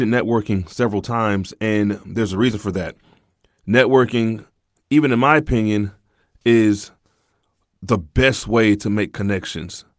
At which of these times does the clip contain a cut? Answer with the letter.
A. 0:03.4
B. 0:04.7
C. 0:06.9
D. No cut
D